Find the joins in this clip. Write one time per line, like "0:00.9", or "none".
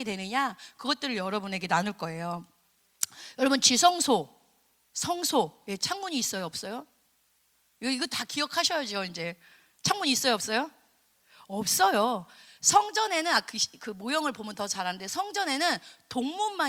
none